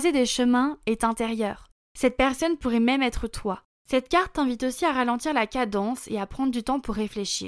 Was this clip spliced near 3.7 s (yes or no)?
yes